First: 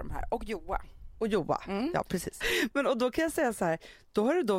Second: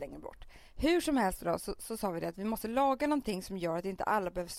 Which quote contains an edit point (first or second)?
first